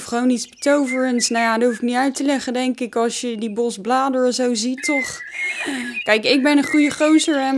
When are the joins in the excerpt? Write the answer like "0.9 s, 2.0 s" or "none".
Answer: 4.8 s, 6.0 s